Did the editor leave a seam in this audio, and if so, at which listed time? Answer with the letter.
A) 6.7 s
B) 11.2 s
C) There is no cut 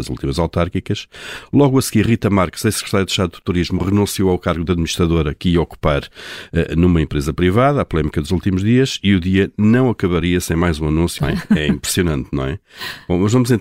B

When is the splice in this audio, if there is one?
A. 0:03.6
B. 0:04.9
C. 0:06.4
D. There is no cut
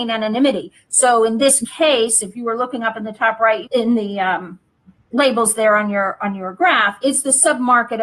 A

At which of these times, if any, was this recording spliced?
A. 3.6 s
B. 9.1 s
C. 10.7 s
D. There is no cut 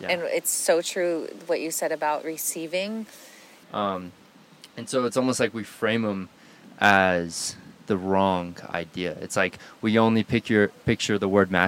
A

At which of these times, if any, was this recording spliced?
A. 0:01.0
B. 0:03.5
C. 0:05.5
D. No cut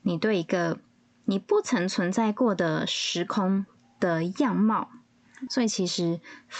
C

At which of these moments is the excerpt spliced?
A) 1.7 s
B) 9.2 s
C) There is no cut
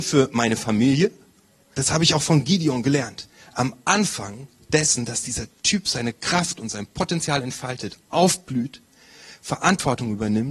A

